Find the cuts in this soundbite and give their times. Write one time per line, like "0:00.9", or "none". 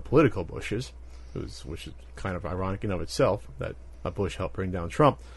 0:03.9